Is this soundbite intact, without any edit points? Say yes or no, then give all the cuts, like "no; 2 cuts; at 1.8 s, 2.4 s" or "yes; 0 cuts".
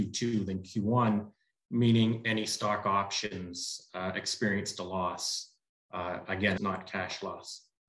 no; 1 cut; at 6.6 s